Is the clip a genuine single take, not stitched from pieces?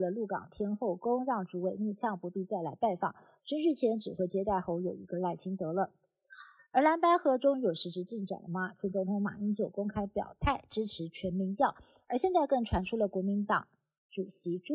yes; 0 cuts

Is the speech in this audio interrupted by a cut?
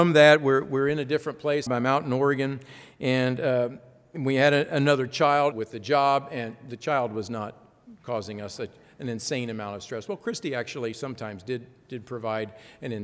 yes; 2 cuts; at 1.7 s, 5.5 s

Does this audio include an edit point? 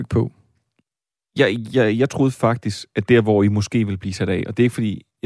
no; 0 cuts

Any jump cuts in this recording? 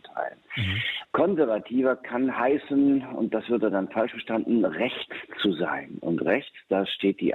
yes; 1 cut; at 1.0 s

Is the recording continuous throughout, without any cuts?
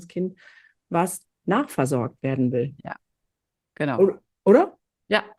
no; 1 cut; at 1.3 s

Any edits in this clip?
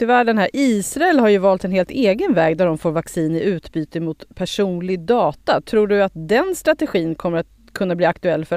no; 0 cuts

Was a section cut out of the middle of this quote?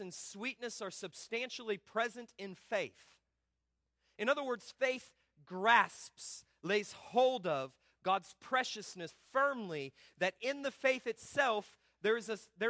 yes; 1 cut; at 9.1 s

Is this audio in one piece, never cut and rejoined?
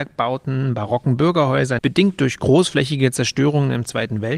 no; 1 cut; at 1.8 s

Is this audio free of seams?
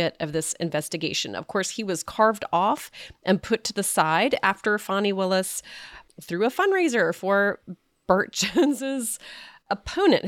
yes; 0 cuts

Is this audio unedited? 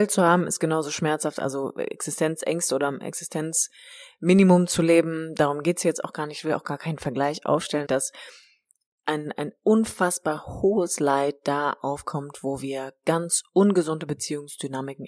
no; 1 cut; at 7.8 s

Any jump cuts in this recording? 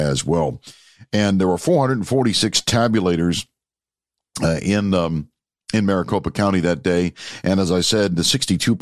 no; 0 cuts

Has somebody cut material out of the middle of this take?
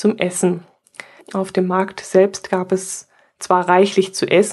yes; 1 cut; at 1.2 s

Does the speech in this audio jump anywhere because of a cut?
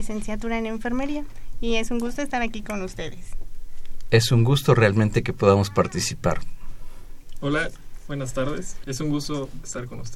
yes; 1 cut; at 8.8 s

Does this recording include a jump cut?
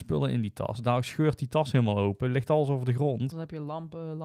yes; 1 cut; at 3.3 s

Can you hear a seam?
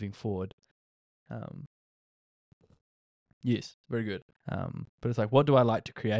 yes; 2 cuts; at 1.2 s, 4.3 s

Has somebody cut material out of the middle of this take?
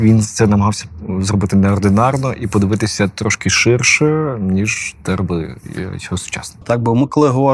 yes; 1 cut; at 6.6 s

